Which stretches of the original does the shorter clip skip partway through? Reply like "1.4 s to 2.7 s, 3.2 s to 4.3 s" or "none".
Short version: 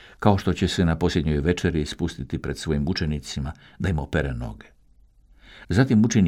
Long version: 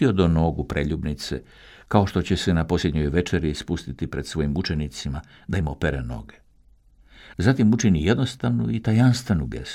none